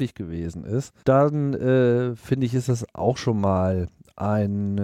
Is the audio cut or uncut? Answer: cut